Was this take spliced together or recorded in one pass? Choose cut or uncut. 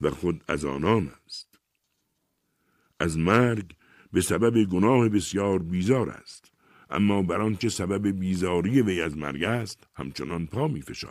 uncut